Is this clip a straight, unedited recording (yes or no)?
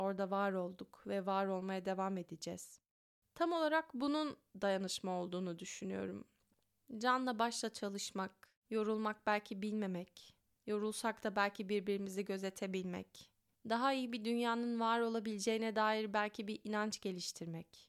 yes